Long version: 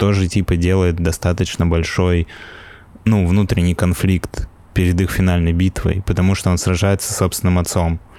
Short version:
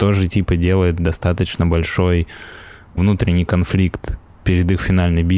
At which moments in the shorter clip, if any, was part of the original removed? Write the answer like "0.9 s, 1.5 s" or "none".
3.0 s